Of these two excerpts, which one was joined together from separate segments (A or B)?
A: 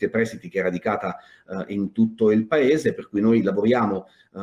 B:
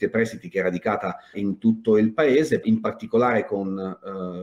B